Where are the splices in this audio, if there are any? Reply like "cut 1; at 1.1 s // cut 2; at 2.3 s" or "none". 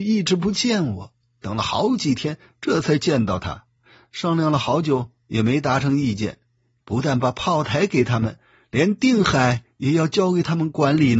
cut 1; at 6.8 s